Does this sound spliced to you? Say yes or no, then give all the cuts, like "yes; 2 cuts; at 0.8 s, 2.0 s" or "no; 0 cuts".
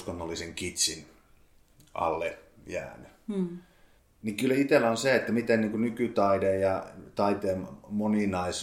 no; 0 cuts